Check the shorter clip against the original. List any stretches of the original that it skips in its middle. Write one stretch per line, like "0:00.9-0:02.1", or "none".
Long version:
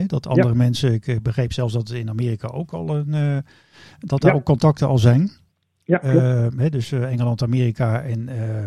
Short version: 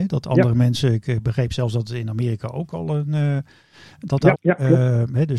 0:04.3-0:05.8